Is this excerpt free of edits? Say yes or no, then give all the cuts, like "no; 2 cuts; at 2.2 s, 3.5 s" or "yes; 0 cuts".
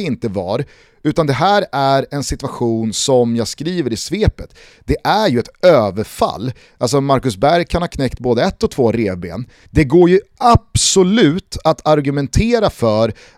no; 1 cut; at 9.6 s